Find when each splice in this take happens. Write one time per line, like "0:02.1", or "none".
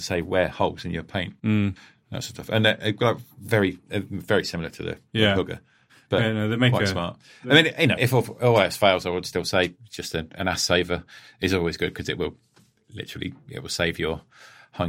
0:08.0